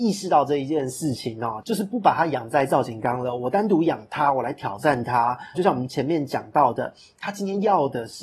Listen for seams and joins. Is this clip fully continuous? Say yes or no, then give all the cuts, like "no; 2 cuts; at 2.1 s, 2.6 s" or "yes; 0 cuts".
no; 1 cut; at 5.5 s